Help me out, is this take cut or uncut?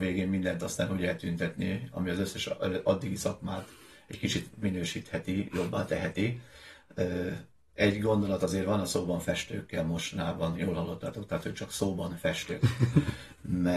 cut